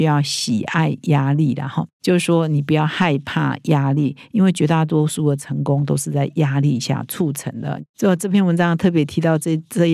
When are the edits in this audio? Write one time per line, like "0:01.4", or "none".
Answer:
none